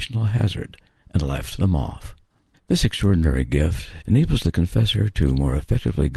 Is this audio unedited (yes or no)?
no